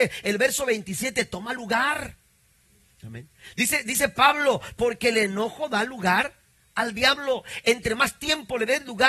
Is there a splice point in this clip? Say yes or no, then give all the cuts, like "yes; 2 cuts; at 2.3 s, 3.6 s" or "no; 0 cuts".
no; 0 cuts